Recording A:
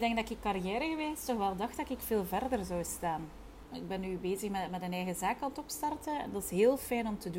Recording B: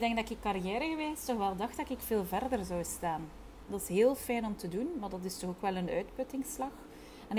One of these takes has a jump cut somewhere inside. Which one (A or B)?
B